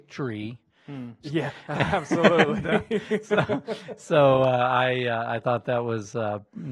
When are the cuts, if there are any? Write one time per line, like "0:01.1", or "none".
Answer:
0:01.2